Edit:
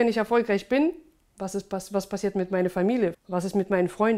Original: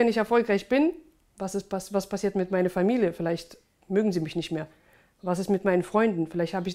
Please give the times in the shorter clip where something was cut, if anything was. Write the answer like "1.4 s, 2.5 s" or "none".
3.1 s